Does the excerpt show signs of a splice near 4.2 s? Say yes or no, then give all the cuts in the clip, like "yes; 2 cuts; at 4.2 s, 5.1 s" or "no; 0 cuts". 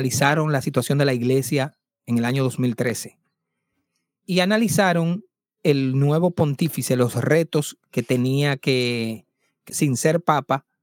no; 1 cut; at 9.7 s